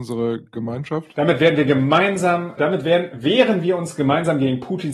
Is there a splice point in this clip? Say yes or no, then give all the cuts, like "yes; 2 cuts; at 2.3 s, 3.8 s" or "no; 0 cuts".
yes; 1 cut; at 2.6 s